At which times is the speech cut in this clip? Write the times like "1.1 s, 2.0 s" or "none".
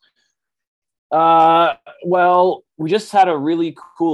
none